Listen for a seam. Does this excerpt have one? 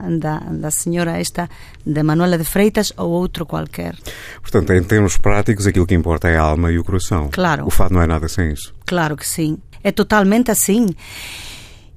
no; 0 cuts

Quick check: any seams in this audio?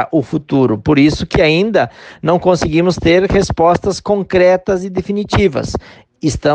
no; 0 cuts

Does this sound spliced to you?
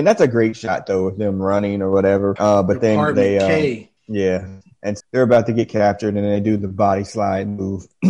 yes; 3 cuts; at 2.4 s, 4.0 s, 5.0 s

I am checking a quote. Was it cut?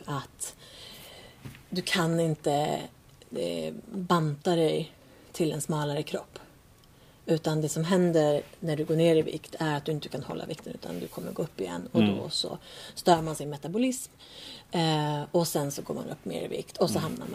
no; 0 cuts

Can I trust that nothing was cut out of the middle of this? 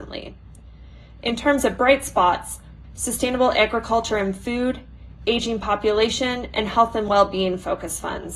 no; 1 cut; at 2.8 s

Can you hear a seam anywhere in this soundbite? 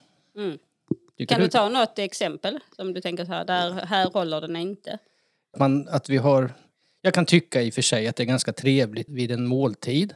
yes; 2 cuts; at 5.5 s, 9.1 s

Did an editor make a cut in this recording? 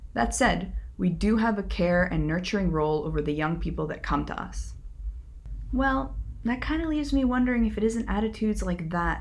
no; 0 cuts

